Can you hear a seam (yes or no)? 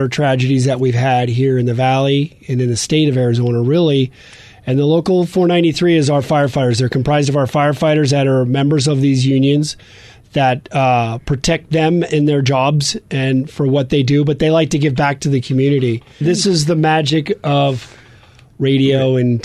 yes